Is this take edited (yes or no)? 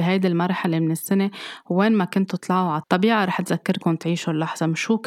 yes